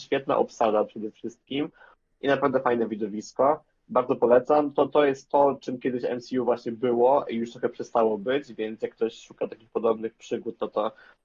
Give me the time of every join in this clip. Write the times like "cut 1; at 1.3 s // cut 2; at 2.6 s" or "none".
none